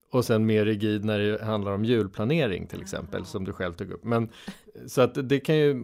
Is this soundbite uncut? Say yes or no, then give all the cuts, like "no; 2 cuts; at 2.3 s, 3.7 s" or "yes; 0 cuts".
yes; 0 cuts